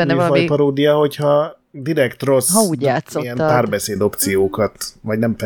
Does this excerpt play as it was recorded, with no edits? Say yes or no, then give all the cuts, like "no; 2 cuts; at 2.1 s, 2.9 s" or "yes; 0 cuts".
no; 1 cut; at 1.7 s